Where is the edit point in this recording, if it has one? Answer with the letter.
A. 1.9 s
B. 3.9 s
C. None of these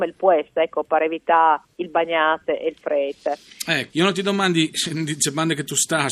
B